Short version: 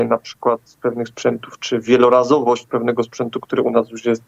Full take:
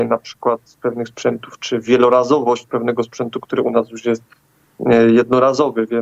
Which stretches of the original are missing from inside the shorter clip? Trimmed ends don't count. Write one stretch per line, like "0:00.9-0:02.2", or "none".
none